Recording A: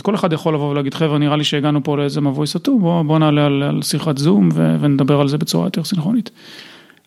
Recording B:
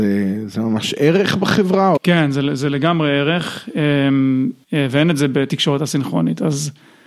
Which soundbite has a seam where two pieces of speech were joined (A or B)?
B